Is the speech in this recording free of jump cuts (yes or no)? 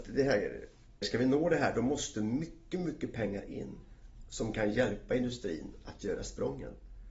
no